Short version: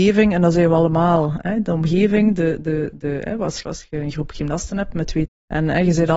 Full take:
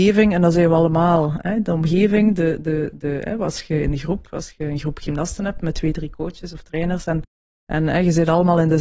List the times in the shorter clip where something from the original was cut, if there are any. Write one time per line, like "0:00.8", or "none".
0:03.6
0:05.2